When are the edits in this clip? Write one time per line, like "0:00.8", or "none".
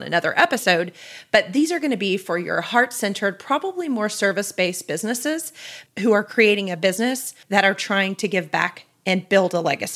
0:05.9
0:07.4

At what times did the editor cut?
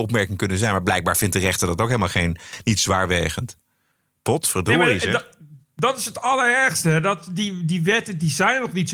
none

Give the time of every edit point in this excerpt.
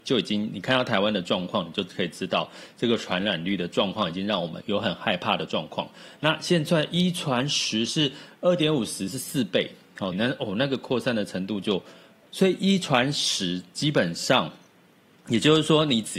0:04.6
0:10.1
0:12.3

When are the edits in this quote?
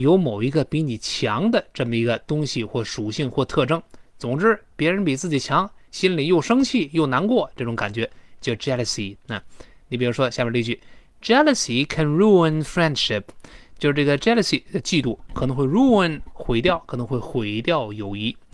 none

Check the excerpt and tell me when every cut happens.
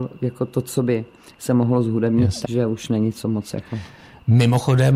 0:02.4

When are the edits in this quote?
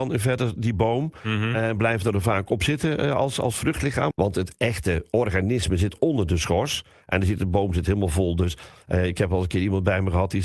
0:04.1

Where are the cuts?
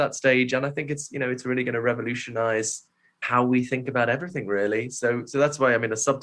none

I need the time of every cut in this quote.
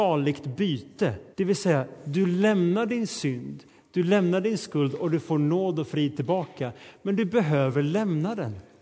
0:01.3

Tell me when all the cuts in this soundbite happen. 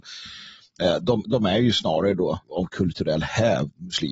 0:02.4

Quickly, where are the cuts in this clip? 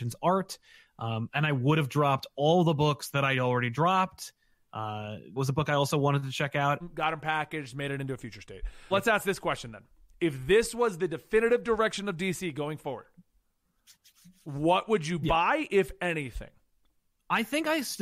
0:05.4
0:06.8
0:08.9

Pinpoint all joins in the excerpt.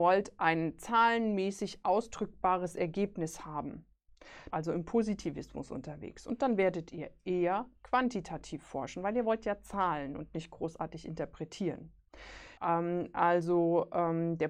0:04.5
0:12.6

